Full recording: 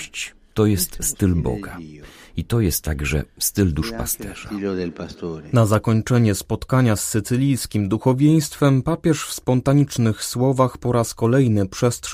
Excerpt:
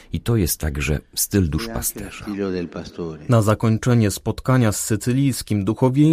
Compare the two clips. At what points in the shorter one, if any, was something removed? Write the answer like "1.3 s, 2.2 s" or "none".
none

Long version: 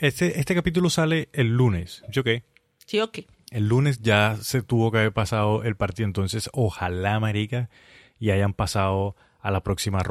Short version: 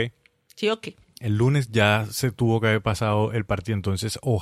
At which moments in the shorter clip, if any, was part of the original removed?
none

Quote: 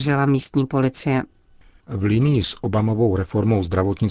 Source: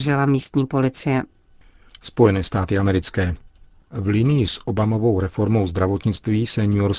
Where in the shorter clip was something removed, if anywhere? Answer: 1.8 s

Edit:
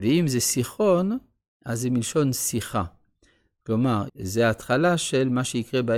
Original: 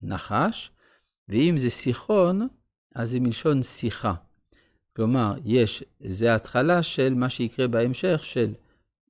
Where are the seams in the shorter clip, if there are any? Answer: 4.1 s

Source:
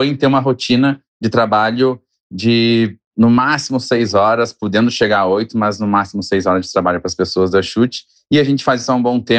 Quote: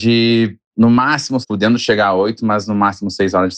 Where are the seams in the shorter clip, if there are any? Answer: 1.4 s

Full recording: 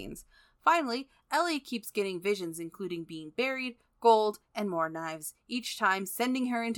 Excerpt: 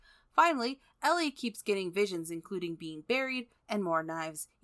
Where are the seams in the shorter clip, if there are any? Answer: 3.6 s

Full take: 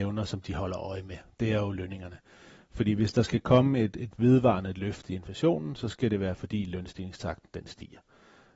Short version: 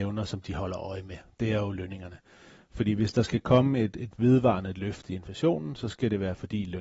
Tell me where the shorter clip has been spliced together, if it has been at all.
none

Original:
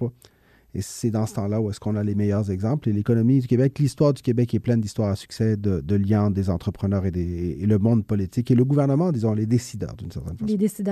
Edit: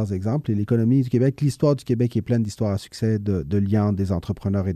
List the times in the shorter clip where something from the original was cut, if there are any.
none

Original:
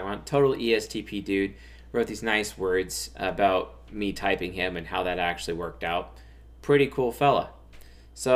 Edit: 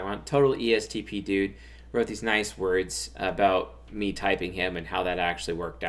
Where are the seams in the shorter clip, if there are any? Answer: none

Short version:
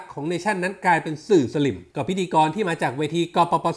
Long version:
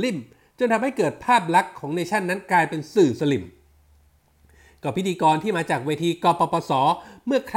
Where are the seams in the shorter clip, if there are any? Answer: 1.9 s

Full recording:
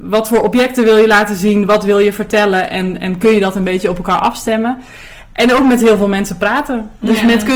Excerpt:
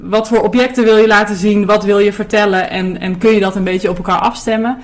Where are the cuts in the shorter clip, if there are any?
none

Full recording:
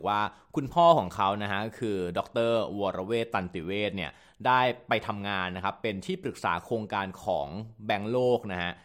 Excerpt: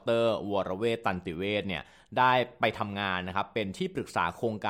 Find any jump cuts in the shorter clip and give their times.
none

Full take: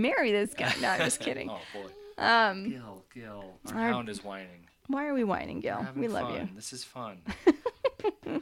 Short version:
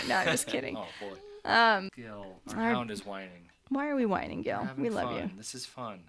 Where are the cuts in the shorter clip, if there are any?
1.9 s

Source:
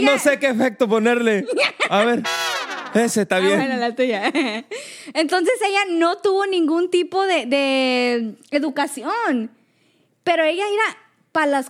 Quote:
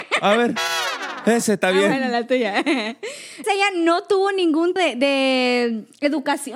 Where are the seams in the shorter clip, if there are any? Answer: 3.4 s, 4.8 s

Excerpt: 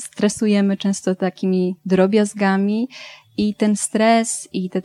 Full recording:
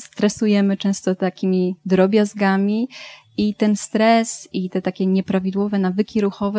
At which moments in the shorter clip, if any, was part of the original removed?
none

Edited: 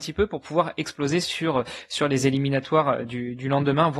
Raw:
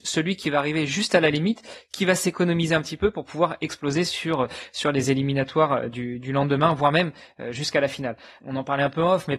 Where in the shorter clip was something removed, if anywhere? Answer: none

